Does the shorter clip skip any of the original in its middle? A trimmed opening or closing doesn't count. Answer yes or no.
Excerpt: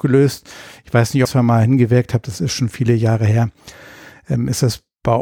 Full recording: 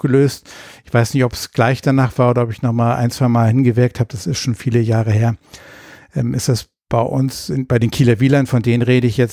yes